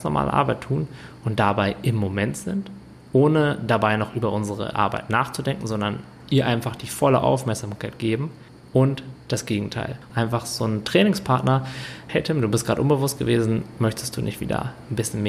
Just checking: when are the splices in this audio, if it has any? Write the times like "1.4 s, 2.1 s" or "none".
10.1 s, 12.1 s

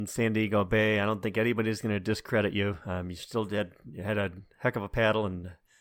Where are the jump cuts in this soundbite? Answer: none

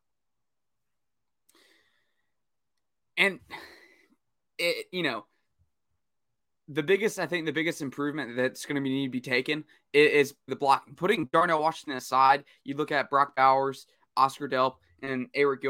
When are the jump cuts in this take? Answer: 10.5 s

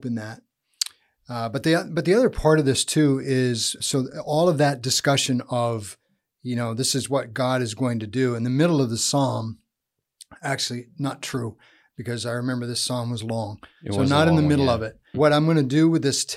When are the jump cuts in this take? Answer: 3.8 s, 15.1 s

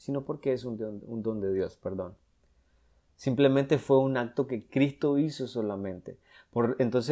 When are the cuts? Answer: 3.1 s

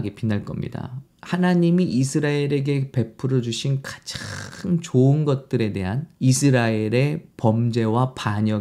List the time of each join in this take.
1.0 s, 6.1 s

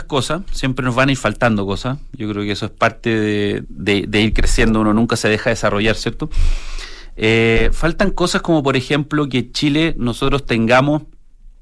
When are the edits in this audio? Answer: 3.6 s

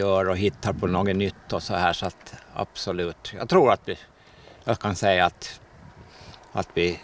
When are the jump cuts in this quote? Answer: none

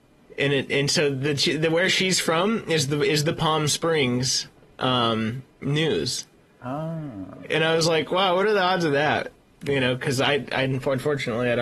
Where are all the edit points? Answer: none

